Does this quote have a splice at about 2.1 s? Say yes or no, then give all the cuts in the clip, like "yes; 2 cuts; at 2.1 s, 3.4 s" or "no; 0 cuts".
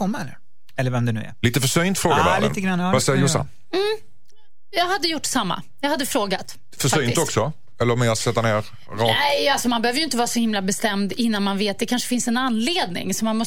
no; 0 cuts